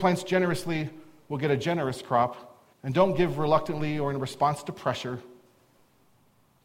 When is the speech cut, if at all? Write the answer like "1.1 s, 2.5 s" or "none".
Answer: 2.7 s